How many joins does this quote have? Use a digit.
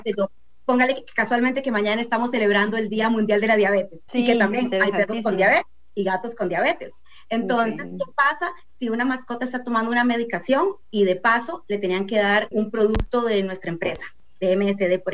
2